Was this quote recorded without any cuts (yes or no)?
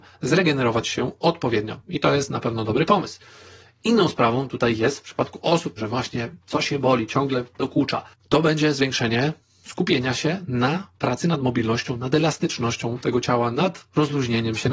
no